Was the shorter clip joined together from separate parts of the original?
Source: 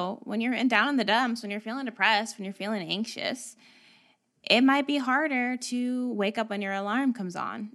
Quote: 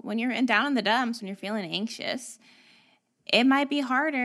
yes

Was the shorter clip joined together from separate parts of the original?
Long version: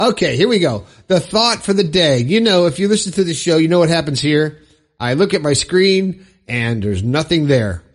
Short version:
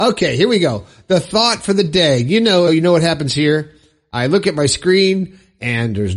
yes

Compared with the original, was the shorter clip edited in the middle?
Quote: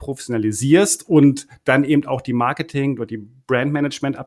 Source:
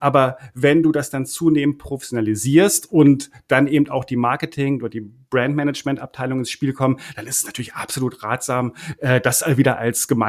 no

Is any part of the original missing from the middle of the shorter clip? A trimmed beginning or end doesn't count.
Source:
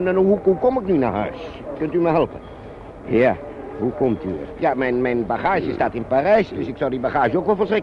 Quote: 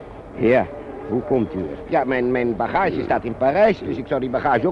no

